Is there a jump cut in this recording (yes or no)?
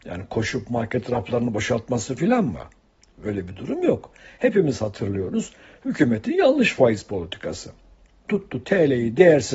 no